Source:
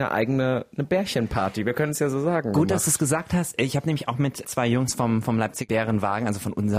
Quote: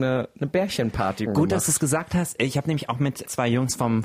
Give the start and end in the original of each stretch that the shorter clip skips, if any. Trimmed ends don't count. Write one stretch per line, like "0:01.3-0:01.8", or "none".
0:01.6-0:02.5